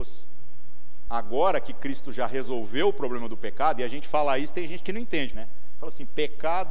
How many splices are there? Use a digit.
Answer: 2